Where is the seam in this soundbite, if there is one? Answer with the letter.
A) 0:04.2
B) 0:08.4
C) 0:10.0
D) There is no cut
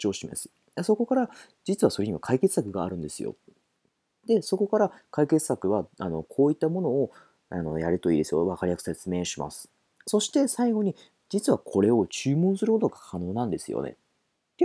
D